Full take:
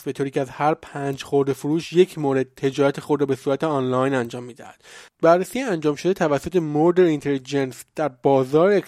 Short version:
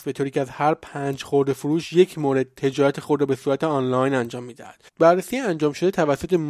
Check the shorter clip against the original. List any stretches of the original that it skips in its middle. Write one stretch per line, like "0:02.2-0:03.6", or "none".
0:04.9-0:05.1